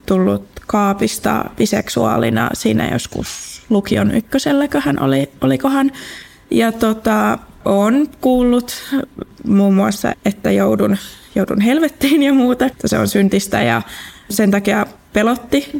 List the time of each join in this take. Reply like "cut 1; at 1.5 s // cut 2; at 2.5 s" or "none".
cut 1; at 10.1 s // cut 2; at 12.7 s